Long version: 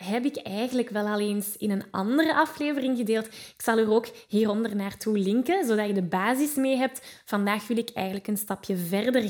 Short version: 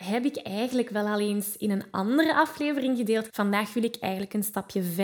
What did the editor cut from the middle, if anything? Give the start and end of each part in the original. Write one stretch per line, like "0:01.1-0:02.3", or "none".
0:03.3-0:07.2